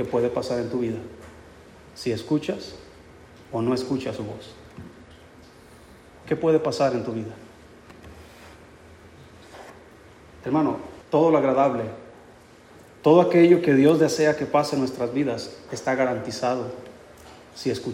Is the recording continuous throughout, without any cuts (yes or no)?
no